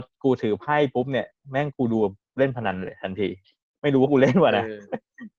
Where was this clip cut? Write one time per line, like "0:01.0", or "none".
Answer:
none